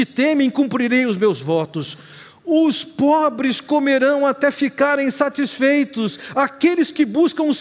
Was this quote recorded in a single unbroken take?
yes; 0 cuts

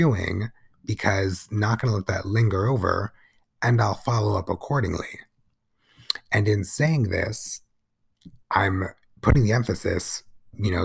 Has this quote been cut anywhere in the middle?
no; 0 cuts

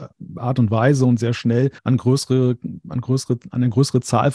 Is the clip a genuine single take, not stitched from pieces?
no; 1 cut; at 1.8 s

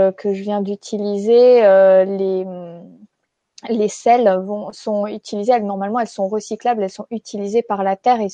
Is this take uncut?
yes; 0 cuts

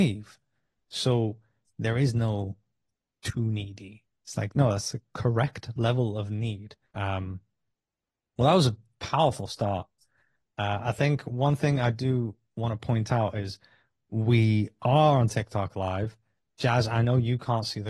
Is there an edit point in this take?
yes; 1 cut; at 6.8 s

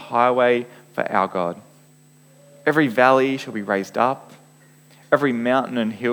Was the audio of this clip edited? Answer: no; 0 cuts

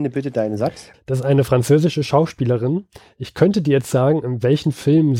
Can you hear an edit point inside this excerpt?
yes; 1 cut; at 0.9 s

